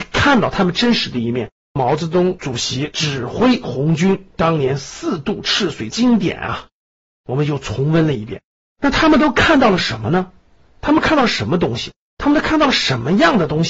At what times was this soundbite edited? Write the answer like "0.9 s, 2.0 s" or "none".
1.5 s, 8.7 s